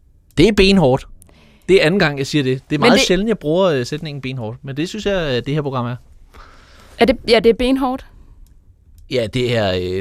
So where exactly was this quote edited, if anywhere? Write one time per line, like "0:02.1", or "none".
none